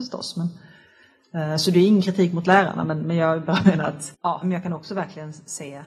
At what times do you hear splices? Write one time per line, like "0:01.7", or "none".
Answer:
0:04.4